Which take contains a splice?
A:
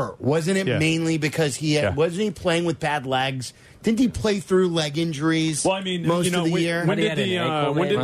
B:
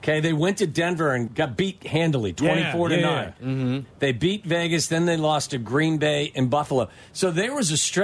B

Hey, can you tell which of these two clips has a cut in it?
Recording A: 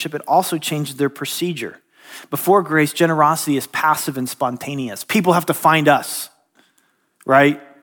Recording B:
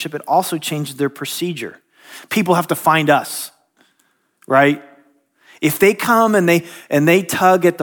B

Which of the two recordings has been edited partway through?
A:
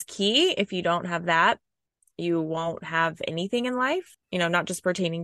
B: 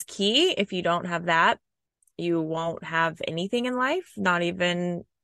A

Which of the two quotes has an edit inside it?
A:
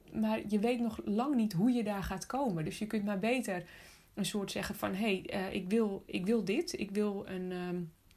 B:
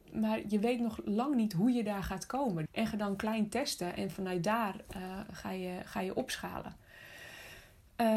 B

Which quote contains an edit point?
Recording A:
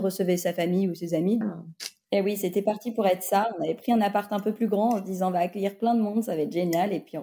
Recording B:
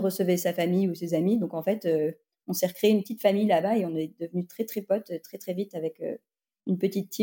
A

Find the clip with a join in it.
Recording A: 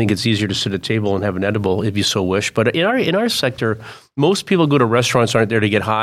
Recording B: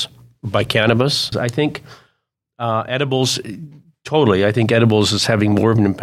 B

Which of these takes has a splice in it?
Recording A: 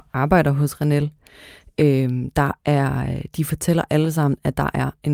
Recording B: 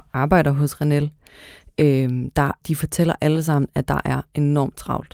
B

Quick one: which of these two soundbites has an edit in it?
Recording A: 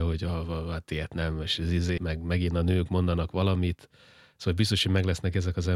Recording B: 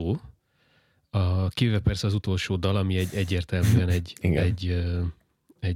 A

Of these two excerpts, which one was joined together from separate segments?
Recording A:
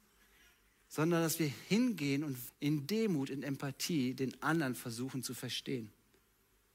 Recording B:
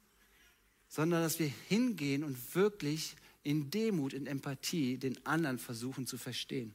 A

